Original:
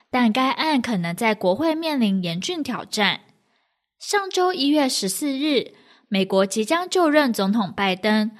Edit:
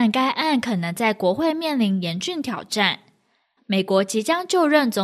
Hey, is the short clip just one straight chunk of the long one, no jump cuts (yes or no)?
no